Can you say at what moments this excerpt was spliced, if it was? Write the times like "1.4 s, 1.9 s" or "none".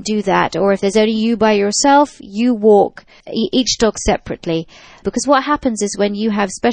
5.0 s